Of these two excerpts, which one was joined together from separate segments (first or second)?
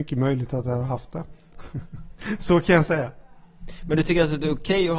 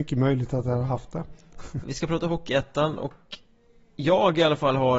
second